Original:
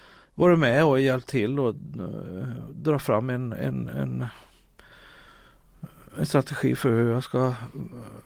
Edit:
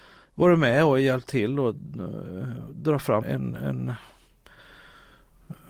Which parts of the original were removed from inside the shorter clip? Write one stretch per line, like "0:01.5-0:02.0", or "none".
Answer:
0:03.2-0:03.5

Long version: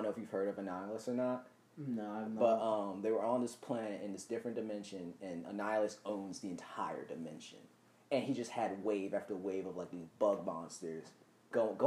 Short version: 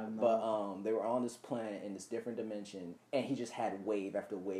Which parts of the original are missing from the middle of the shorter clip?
0:05.2-0:07.9

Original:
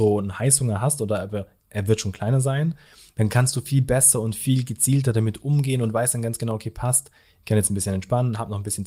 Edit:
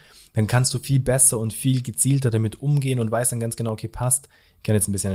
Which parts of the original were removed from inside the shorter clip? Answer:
none

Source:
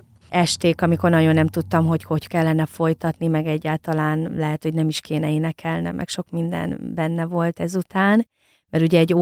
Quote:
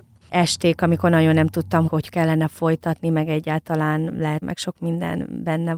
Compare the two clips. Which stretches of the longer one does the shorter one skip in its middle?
0:01.9-0:02.0
0:04.6-0:05.9

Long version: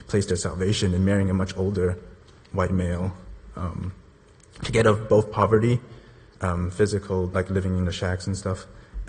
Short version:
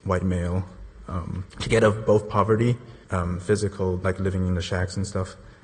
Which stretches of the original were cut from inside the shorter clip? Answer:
0:04.0-0:04.5
0:06.1-0:06.3

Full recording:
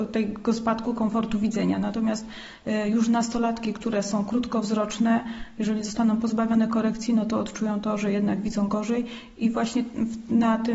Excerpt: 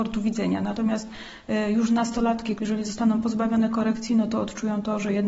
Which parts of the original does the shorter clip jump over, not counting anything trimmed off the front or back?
0:03.7-0:05.5

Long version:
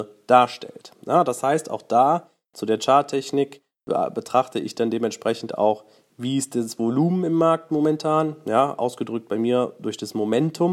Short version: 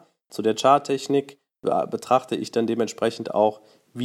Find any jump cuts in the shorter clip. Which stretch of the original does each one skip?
none

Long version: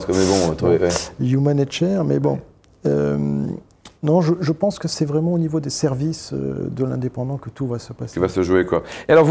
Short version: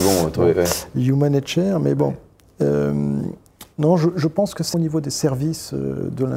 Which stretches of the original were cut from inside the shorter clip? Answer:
0:05.0-0:05.3

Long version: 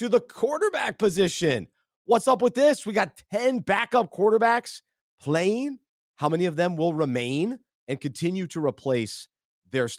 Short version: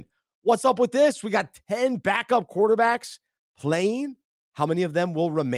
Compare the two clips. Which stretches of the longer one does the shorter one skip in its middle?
none

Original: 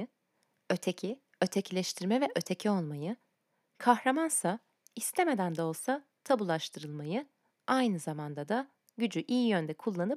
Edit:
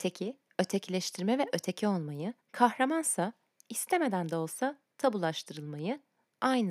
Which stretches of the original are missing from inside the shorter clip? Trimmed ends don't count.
0:03.2-0:03.7

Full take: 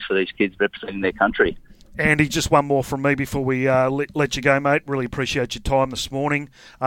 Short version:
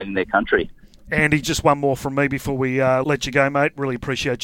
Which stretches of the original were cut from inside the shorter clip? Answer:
0:03.9-0:04.1

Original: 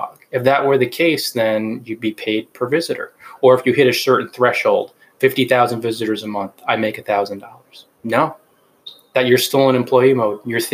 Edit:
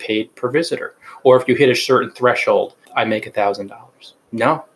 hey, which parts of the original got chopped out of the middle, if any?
0:05.0-0:06.6

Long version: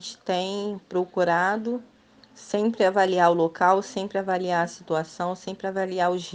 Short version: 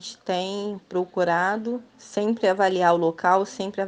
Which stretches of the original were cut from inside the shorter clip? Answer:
0:01.9-0:02.3

